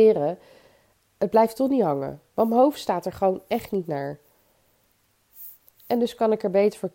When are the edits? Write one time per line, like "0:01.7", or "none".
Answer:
none